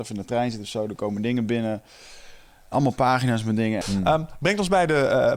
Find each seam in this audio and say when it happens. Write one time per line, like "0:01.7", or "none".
0:03.8